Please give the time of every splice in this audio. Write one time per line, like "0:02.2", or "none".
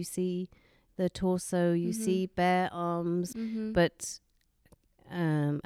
0:03.3